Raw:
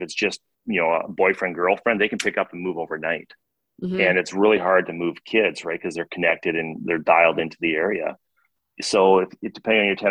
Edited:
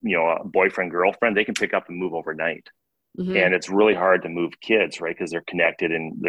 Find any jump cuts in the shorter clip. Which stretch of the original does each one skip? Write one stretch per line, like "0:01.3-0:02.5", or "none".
none